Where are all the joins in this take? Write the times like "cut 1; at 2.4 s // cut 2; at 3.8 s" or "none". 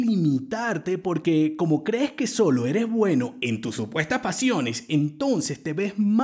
none